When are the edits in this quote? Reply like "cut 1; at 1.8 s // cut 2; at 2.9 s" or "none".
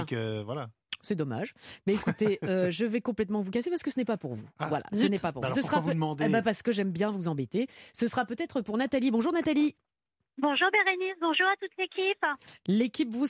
none